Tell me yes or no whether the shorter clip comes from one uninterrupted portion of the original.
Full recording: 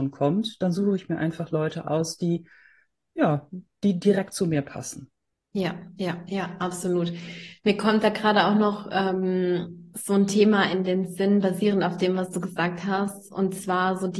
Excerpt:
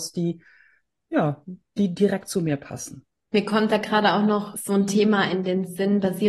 no